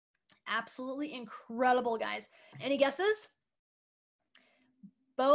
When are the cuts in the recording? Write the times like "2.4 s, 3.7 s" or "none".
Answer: 2.5 s